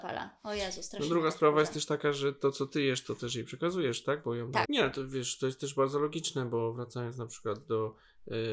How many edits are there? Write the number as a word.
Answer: one